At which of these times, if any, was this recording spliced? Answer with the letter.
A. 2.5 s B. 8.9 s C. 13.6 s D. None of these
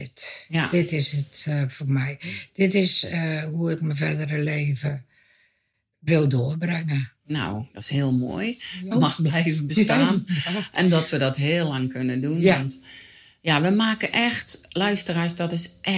B